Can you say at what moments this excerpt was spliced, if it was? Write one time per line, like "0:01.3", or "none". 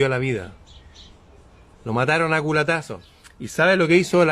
0:01.7